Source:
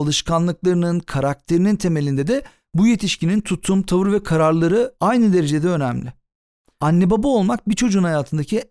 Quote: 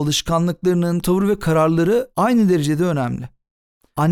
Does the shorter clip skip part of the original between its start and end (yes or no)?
yes